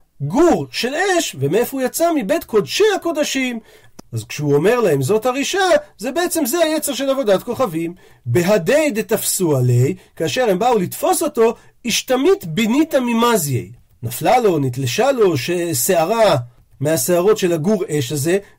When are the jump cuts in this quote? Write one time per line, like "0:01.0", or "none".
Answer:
0:04.0

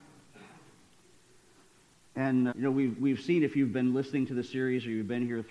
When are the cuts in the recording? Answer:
0:02.5

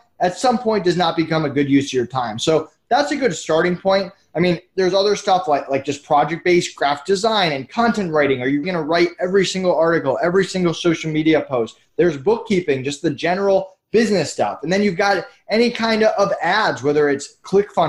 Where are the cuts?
0:08.6

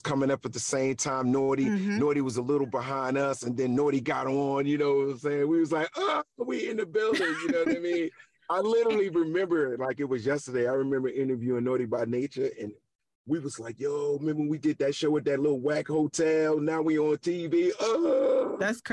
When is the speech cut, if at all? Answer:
none

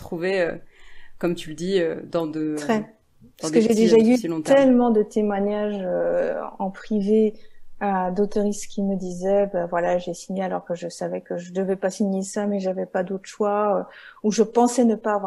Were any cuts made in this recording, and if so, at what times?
none

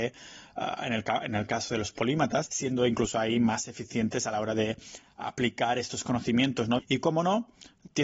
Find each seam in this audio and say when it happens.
0:02.5
0:06.8

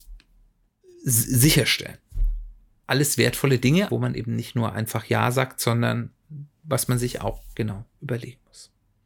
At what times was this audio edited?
0:02.8
0:03.9

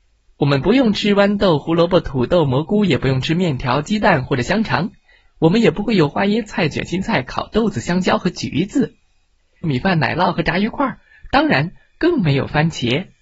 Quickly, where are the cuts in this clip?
0:09.6

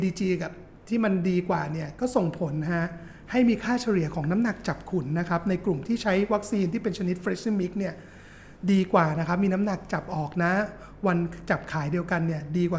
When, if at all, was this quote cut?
none

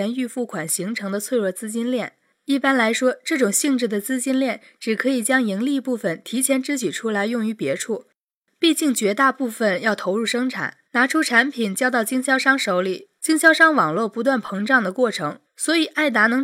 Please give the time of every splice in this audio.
0:10.8
0:13.2
0:15.4

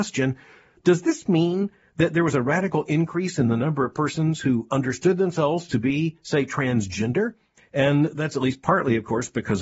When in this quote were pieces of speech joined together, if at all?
0:07.6

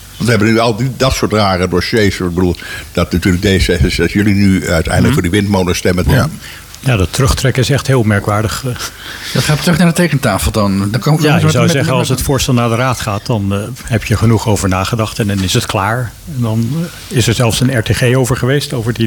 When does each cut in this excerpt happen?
0:06.0

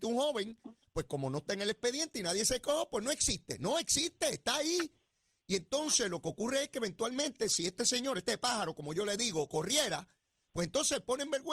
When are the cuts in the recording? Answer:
none

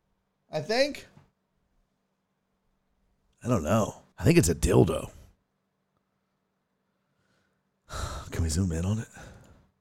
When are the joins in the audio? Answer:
0:04.1

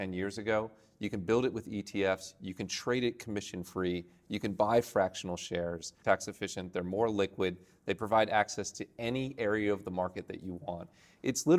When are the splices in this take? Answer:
0:06.0

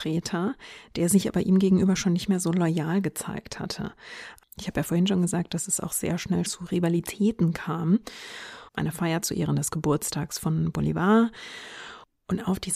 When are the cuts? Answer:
0:06.4
0:08.7

